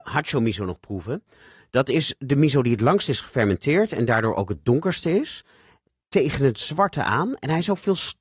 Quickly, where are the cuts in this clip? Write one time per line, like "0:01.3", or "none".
none